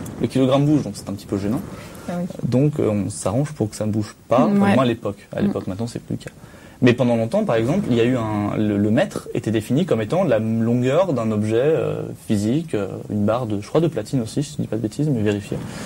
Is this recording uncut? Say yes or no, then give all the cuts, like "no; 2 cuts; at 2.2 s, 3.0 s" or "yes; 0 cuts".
yes; 0 cuts